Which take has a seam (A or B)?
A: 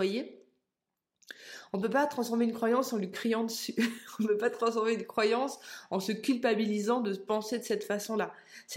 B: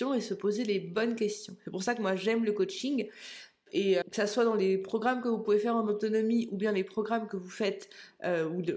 B